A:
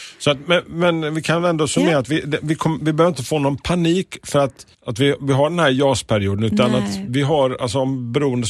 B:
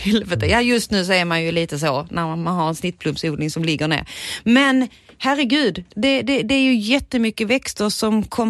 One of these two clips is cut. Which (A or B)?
A